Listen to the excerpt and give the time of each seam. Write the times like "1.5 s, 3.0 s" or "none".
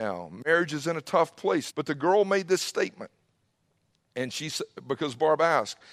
1.7 s

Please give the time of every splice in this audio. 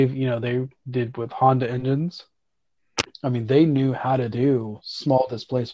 3.1 s

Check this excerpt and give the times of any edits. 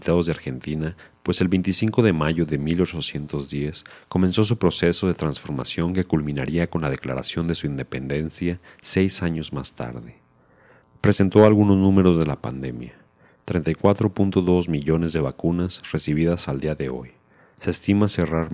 none

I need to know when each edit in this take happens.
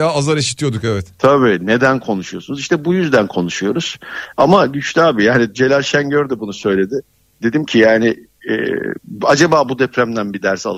none

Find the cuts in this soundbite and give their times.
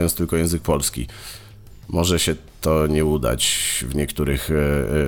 none

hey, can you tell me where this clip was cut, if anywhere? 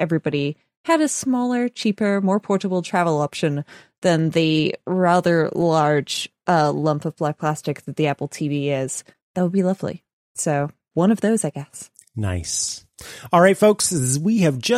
10.9 s

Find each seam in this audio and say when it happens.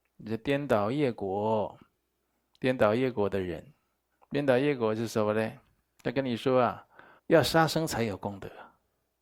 7.2 s

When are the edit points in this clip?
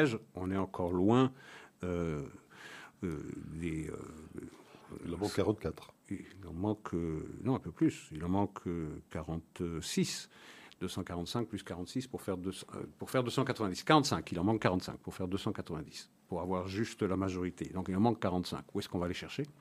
none

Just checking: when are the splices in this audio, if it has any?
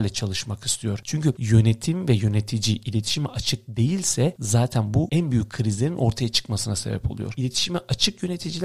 none

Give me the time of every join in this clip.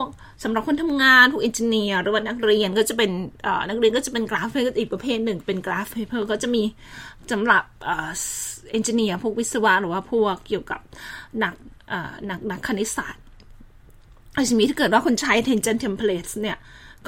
none

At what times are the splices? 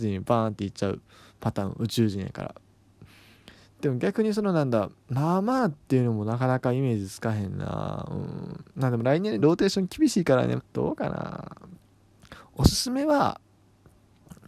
9.4 s, 10.6 s

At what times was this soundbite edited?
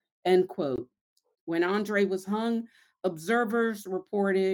1.3 s

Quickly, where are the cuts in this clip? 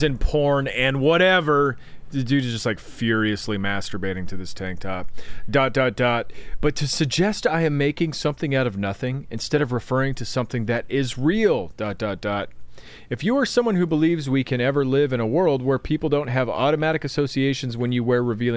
none

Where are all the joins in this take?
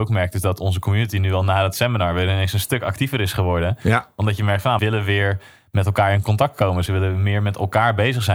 4.8 s, 6.9 s

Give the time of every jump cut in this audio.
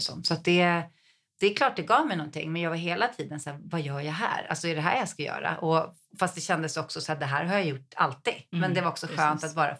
none

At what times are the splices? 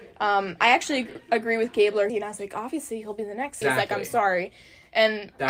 2.1 s, 3.6 s

